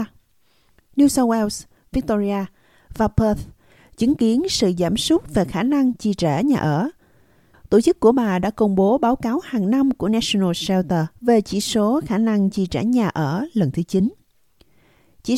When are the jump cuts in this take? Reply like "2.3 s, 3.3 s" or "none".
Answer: 7.5 s, 11.2 s